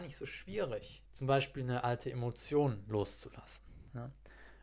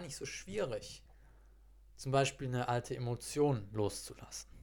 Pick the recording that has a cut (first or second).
first